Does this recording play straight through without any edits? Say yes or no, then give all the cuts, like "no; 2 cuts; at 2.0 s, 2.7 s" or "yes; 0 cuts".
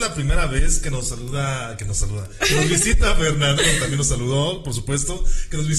yes; 0 cuts